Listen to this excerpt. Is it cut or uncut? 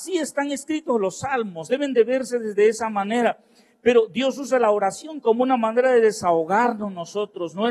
uncut